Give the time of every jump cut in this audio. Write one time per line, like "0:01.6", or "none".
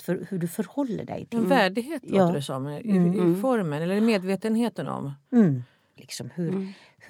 0:06.0